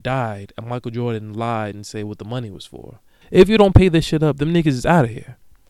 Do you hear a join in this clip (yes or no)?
yes